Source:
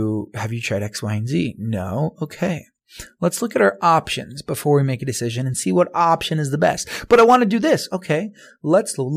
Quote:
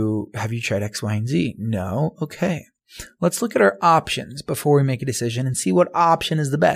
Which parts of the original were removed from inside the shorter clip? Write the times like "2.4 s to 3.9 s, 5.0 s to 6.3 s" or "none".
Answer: none